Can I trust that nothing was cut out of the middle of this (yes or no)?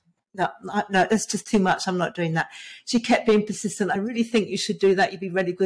yes